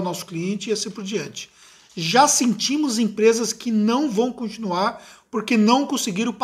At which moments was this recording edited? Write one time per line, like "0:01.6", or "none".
none

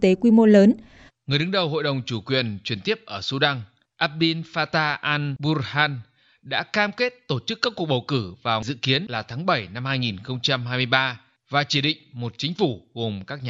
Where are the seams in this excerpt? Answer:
0:01.1

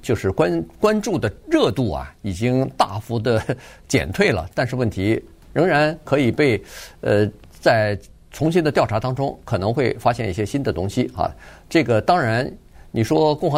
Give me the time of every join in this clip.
0:05.4

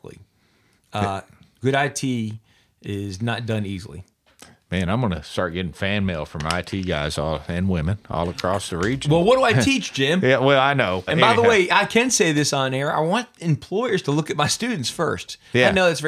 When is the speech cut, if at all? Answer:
0:11.1

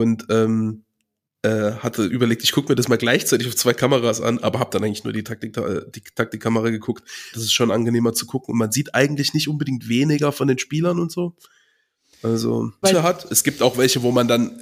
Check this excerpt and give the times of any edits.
0:07.3
0:12.8

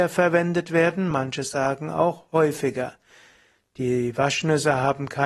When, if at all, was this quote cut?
0:01.1

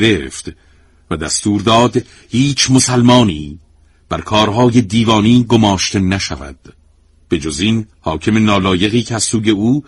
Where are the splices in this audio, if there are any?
0:07.9

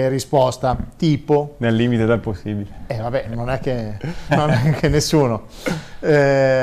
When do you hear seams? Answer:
0:03.2
0:04.3

